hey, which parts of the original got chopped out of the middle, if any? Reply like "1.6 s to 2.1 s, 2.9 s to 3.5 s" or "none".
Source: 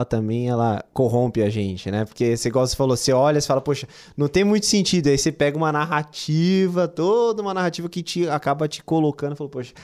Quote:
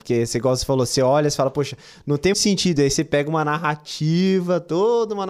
4.4 s to 4.6 s